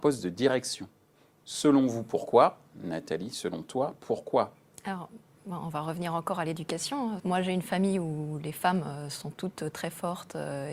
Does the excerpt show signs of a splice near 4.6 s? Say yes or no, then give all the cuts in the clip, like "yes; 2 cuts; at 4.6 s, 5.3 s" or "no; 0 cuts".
no; 1 cut; at 7.2 s